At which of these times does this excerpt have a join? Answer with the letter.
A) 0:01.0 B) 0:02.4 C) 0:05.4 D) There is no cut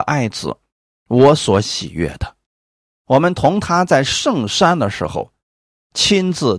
D